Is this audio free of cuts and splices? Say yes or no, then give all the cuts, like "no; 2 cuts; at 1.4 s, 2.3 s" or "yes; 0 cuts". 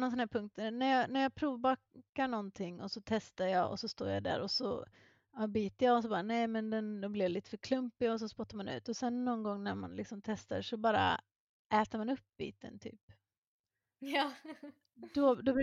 yes; 0 cuts